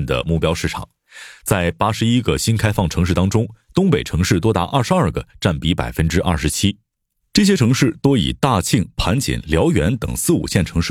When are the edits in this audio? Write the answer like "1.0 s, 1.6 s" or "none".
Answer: none